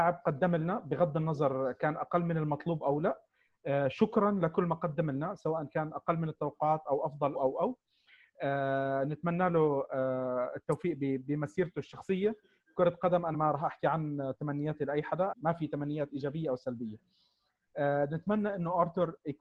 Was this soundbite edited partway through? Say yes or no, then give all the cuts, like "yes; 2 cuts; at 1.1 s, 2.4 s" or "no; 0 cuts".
yes; 3 cuts; at 7.3 s, 13.3 s, 15.3 s